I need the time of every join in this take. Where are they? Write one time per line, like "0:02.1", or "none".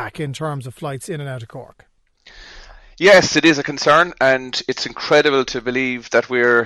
none